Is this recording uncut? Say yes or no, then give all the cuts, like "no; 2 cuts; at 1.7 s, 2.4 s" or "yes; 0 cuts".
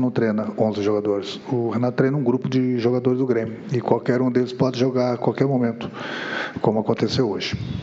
yes; 0 cuts